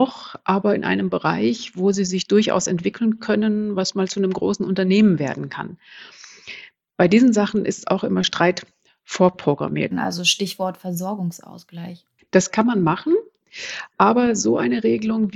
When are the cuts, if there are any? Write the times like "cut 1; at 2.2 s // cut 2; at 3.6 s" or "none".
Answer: cut 1; at 9.9 s